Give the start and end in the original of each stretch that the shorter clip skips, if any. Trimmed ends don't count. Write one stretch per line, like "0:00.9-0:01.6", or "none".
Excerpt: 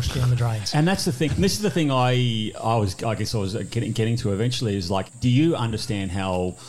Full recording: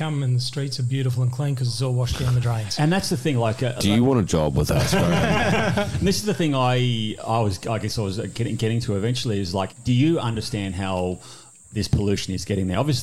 0:03.3-0:05.9

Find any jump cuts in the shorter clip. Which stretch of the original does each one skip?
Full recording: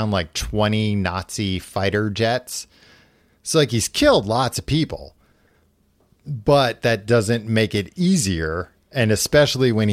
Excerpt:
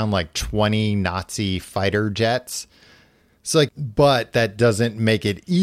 0:03.7-0:06.2

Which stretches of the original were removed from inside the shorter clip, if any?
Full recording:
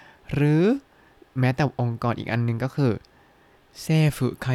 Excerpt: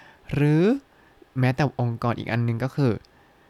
none

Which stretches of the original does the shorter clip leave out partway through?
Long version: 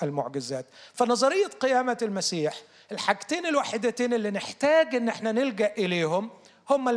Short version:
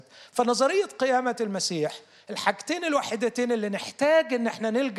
none

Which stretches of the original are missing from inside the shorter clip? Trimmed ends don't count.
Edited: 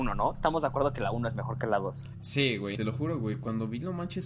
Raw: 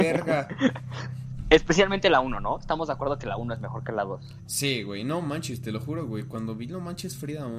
0:05.0-0:05.6

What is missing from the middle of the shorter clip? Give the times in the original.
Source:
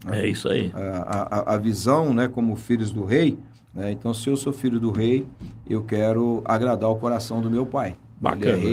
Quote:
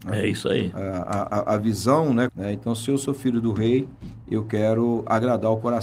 0:02.3-0:03.7

